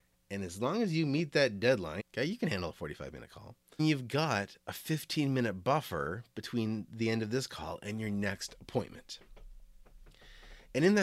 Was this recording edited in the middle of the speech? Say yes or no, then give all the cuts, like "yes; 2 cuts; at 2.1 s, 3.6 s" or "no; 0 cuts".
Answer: yes; 2 cuts; at 2.0 s, 3.8 s